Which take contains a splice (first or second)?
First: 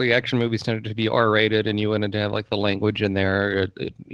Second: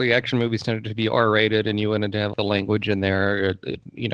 second